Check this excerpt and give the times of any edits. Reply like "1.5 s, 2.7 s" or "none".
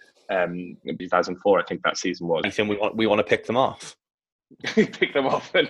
1.0 s, 2.4 s